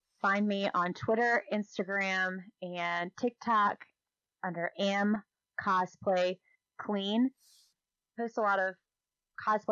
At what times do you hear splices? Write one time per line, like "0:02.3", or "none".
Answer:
none